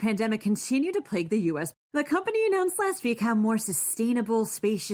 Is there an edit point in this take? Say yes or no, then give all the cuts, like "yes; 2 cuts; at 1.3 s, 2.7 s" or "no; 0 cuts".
yes; 1 cut; at 1.7 s